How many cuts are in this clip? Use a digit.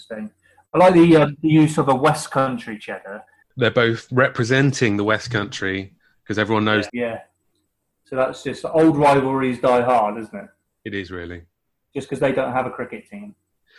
2